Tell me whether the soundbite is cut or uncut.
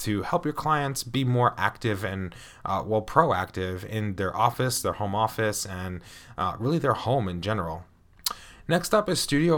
uncut